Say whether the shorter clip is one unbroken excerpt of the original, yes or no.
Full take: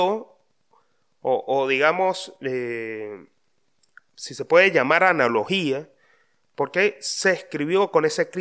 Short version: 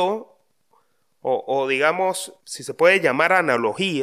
no